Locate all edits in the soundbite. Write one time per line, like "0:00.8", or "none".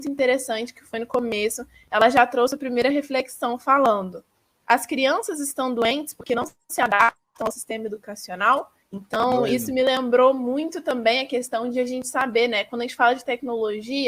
0:08.8